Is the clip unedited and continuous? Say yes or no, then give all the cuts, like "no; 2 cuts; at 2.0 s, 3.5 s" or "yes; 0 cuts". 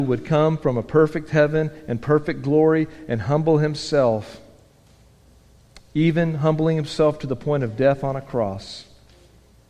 yes; 0 cuts